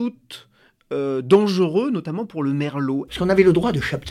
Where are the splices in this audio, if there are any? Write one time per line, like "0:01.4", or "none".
0:03.1